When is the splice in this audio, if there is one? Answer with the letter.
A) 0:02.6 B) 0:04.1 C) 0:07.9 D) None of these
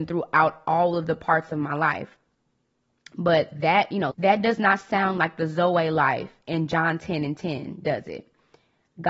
B